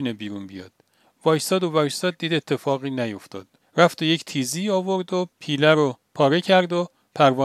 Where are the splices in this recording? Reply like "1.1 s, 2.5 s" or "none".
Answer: 3.6 s